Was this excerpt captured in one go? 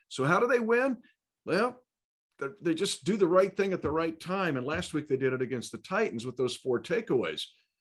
yes; 0 cuts

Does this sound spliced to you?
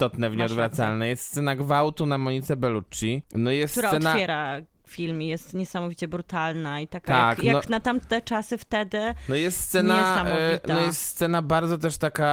no; 0 cuts

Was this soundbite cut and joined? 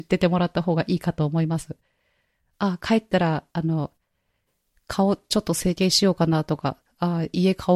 no; 0 cuts

